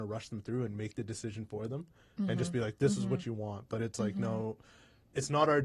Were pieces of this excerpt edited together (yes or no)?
no